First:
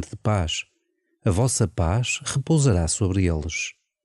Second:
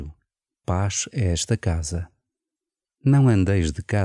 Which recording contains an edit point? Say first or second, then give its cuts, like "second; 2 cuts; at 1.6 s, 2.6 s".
second; 1 cut; at 2.9 s